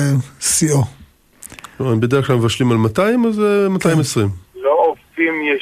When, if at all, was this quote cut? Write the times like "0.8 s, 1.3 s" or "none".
4.5 s